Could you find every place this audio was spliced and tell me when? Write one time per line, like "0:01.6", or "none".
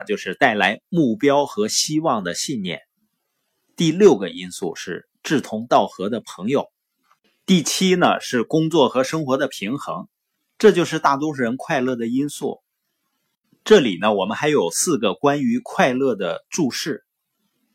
none